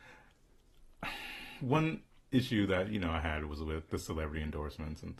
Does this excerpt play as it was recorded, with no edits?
no; 1 cut; at 3.9 s

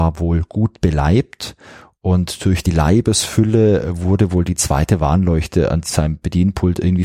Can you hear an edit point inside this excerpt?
no; 0 cuts

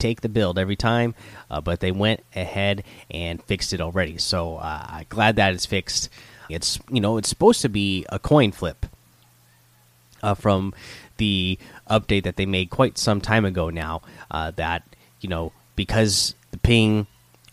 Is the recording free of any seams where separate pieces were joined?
no; 1 cut; at 6.5 s

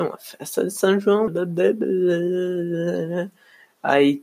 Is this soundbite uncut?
no; 1 cut; at 1.3 s

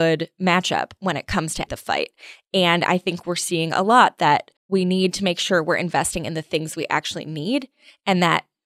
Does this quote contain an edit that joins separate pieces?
yes; 2 cuts; at 1.7 s, 4.6 s

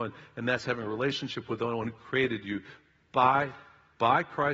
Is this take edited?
no; 0 cuts

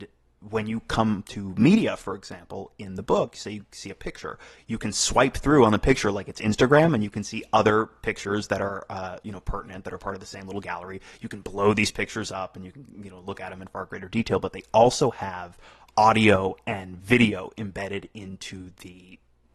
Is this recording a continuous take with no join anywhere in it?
yes; 0 cuts

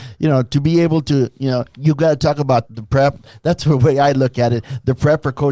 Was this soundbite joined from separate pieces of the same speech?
yes; 1 cut; at 2.7 s

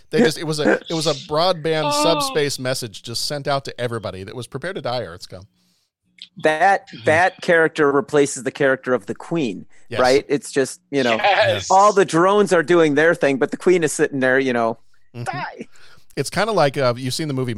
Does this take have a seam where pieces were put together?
yes; 1 cut; at 15.2 s

